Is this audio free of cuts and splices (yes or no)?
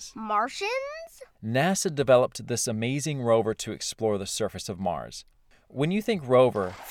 no